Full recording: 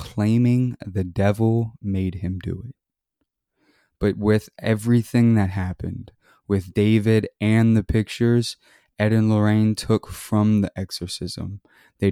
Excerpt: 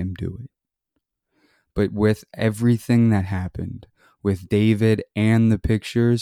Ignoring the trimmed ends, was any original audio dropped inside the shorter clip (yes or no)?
no